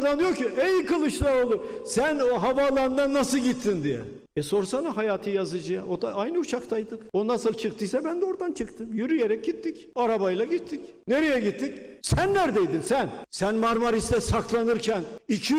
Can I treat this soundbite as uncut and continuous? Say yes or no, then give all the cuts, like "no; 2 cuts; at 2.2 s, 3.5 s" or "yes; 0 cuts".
no; 1 cut; at 12.0 s